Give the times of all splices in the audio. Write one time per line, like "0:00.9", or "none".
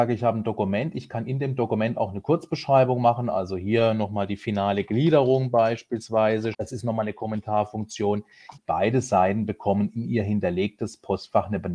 0:06.5
0:08.6